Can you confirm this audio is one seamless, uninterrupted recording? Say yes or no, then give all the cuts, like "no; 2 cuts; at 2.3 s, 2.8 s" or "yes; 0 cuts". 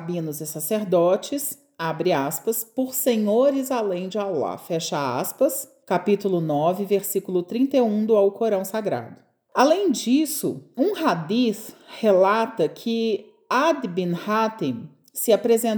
yes; 0 cuts